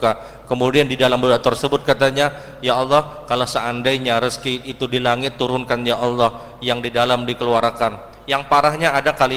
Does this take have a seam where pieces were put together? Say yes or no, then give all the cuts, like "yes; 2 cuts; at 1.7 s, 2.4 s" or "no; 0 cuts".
no; 0 cuts